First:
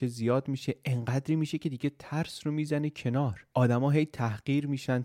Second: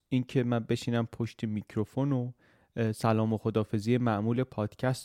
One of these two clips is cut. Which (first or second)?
first